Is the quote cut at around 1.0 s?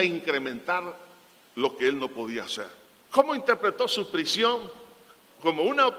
no; 1 cut; at 3.1 s

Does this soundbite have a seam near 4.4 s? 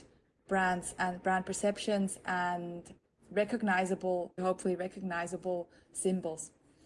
yes; 1 cut; at 4.4 s

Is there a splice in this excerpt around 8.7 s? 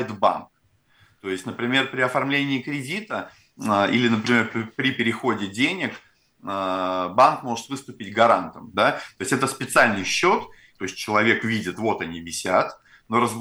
yes; 2 cuts; at 8.7 s, 10.8 s

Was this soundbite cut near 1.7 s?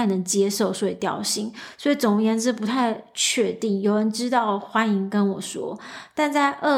no; 0 cuts

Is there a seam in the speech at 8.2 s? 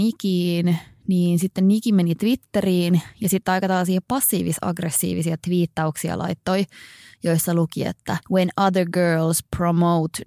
yes; 1 cut; at 8.2 s

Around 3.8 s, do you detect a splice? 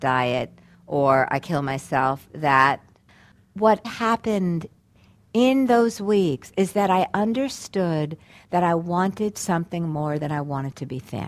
yes; 1 cut; at 3.8 s

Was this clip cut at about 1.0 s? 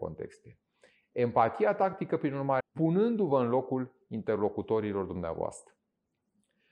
no; 1 cut; at 2.6 s

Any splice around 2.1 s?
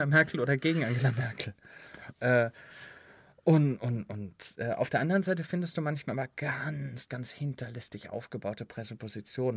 yes; 1 cut; at 2.1 s

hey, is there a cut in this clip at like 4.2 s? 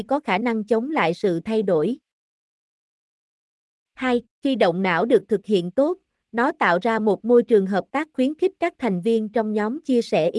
yes; 1 cut; at 4.2 s

